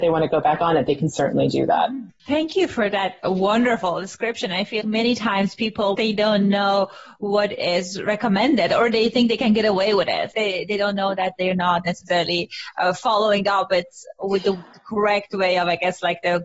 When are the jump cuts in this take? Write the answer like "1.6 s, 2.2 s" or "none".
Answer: 4.8 s, 5.9 s, 10.3 s

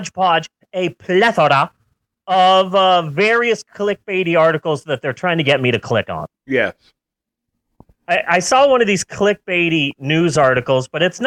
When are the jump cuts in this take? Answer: 6.3 s

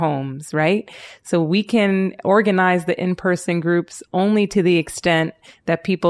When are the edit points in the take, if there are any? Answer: none

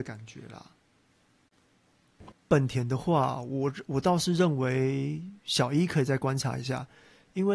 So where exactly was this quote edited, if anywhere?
2.3 s

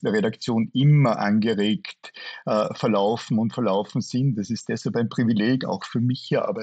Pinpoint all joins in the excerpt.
none

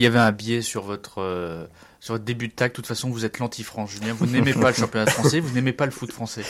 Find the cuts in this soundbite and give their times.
none

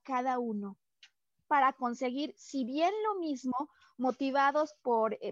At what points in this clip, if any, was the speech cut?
none

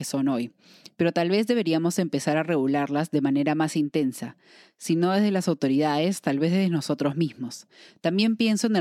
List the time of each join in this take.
none

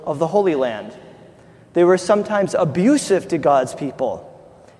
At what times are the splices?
none

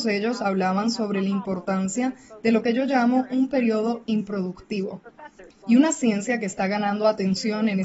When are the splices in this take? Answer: 5.6 s

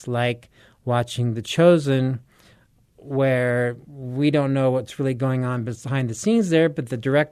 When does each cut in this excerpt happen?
none

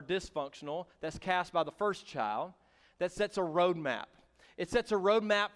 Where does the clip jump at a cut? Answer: none

